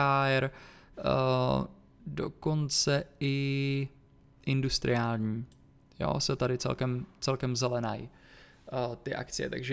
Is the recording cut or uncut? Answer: uncut